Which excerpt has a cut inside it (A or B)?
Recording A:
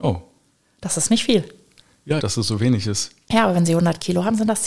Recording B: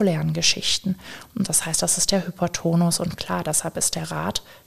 A